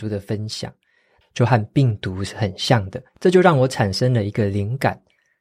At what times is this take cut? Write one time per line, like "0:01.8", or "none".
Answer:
0:01.2
0:03.1